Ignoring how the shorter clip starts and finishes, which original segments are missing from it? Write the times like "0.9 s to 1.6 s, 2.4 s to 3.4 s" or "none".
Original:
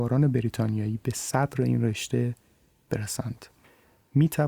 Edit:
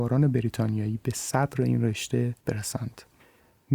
2.4 s to 2.8 s

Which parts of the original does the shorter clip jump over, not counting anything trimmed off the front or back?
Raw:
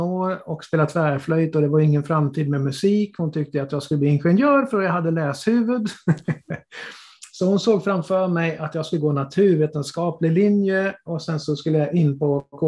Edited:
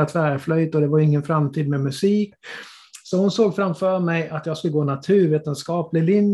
3.1 s to 6.6 s

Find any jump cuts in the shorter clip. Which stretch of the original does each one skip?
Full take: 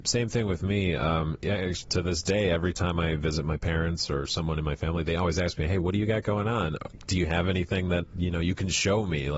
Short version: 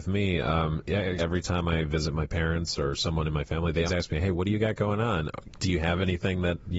1.7 s to 2.5 s, 5.2 s to 5.3 s

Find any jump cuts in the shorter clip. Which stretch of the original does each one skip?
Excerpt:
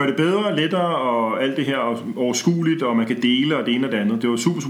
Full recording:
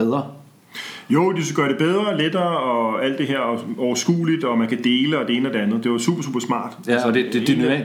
none

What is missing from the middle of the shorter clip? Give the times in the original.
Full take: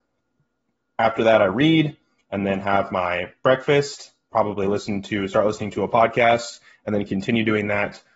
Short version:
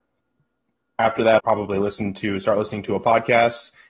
1.4 s to 4.3 s

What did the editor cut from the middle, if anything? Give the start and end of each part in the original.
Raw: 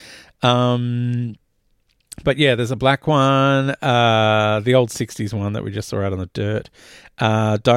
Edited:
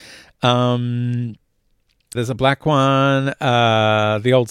2.2 s to 2.6 s

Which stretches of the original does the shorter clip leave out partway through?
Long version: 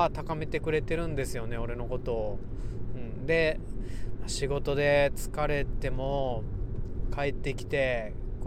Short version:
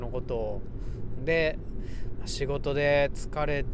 3.0 s to 3.2 s

